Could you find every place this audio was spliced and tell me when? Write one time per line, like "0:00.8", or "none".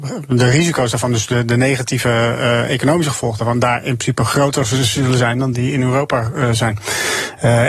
none